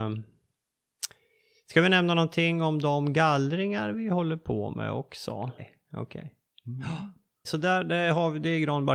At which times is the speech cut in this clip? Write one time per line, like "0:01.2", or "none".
0:05.6
0:07.4